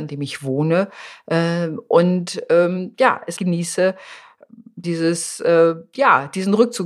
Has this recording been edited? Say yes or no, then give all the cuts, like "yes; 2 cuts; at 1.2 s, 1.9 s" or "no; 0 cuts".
yes; 2 cuts; at 3.4 s, 4.8 s